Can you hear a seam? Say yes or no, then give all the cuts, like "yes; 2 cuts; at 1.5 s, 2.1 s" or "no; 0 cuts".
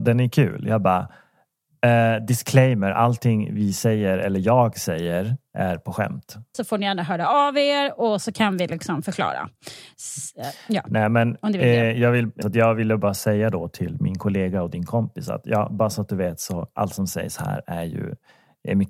yes; 2 cuts; at 6.5 s, 12.4 s